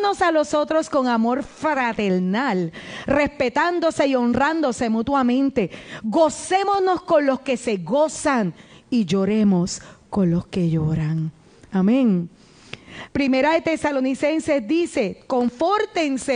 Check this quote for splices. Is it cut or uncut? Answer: cut